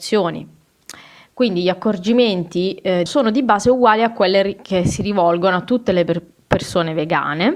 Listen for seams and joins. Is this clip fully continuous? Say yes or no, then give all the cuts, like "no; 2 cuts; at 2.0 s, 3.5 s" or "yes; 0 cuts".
no; 1 cut; at 3.1 s